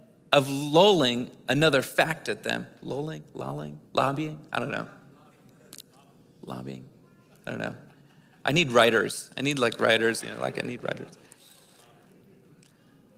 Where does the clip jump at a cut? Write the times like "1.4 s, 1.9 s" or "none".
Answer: 3.9 s, 10.2 s